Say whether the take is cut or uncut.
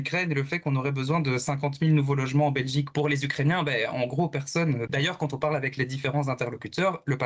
cut